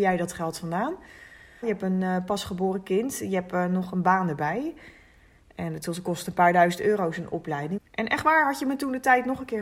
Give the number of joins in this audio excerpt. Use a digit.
2